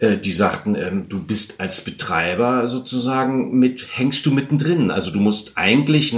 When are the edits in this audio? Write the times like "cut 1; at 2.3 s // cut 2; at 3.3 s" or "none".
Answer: none